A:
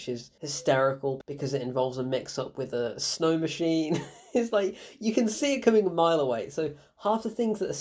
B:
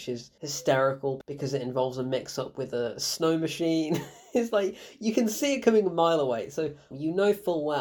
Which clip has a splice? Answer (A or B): B